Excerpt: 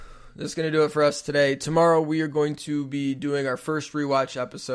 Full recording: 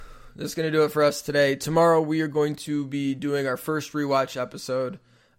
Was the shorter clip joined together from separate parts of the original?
no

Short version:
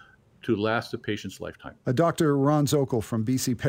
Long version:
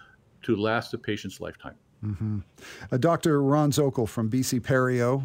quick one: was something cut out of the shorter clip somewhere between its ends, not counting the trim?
yes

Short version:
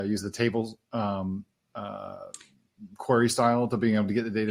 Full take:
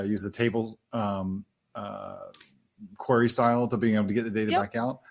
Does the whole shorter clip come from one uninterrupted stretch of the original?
yes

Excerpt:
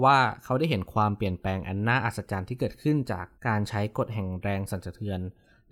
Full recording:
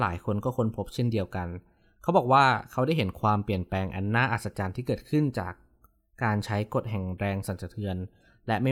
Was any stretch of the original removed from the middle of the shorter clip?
yes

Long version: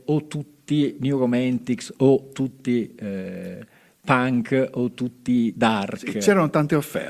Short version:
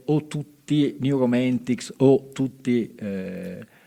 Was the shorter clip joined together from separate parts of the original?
no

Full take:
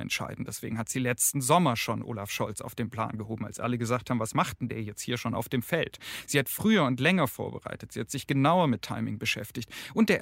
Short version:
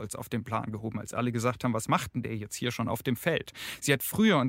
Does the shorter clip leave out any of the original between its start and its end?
no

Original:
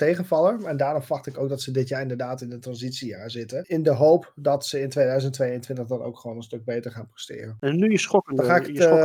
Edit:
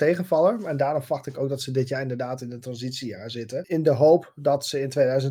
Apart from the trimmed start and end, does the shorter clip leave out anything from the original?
no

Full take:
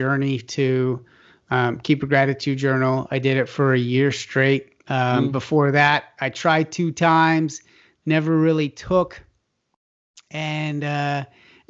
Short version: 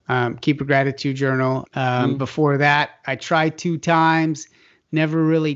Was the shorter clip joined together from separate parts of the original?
yes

